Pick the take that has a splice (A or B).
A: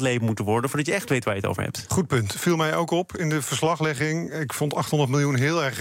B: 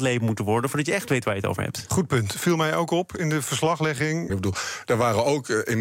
B